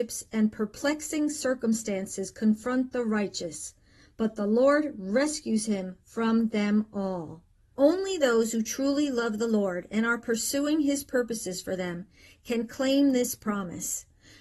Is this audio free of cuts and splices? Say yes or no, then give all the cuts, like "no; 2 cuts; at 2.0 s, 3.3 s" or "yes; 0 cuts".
no; 1 cut; at 7.7 s